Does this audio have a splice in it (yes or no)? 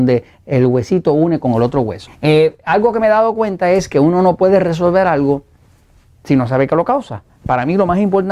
yes